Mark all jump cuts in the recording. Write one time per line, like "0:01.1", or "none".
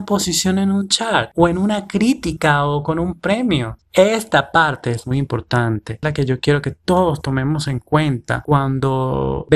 0:03.8